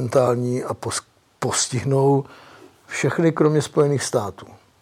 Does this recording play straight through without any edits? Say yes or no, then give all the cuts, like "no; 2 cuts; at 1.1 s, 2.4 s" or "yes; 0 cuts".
yes; 0 cuts